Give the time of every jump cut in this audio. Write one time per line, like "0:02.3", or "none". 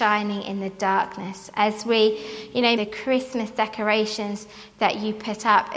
0:02.8